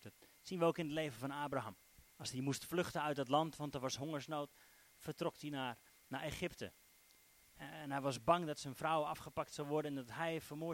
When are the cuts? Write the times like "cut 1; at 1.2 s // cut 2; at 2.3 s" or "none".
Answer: cut 1; at 2.1 s